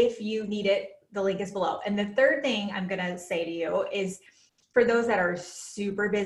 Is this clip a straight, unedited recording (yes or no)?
yes